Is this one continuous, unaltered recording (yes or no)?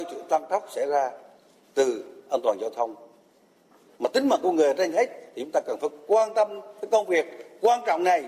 yes